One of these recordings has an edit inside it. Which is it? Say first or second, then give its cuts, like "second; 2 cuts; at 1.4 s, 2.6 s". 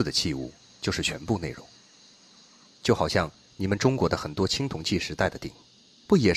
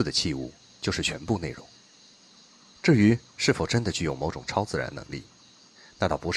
first; 1 cut; at 2.7 s